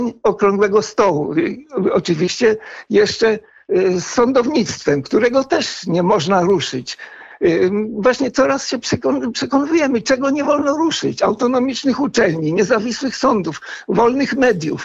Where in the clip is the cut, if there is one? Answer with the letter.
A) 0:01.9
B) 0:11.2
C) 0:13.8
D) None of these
D